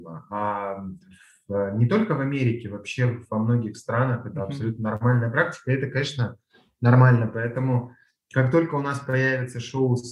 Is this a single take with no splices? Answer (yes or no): yes